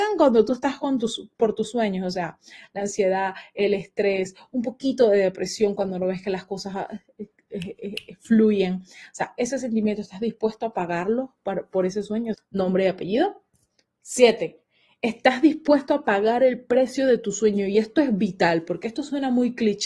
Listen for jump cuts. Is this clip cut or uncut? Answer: cut